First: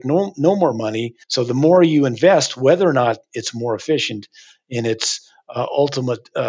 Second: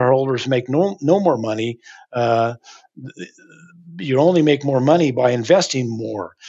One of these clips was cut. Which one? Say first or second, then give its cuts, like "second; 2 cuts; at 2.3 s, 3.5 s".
first; 1 cut; at 1.2 s